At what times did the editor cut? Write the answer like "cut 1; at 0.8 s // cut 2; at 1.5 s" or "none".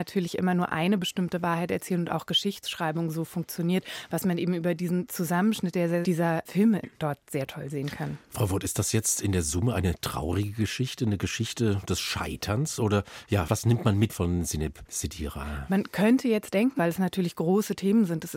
cut 1; at 6.0 s // cut 2; at 16.8 s